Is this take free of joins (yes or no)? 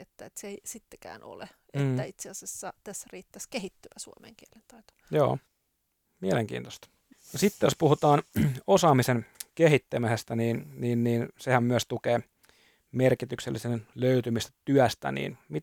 no